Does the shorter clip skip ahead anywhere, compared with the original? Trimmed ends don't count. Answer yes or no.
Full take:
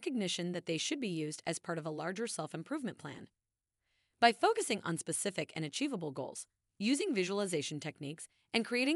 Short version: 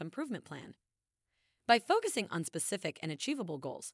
no